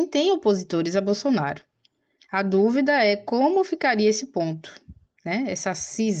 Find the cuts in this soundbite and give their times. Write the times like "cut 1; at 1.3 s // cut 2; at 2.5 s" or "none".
none